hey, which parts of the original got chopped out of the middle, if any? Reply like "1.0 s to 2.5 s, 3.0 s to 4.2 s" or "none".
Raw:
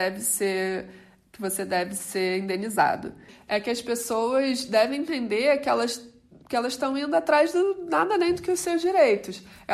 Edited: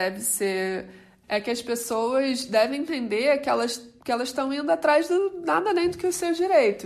1.2 s to 3.4 s, 6.2 s to 6.4 s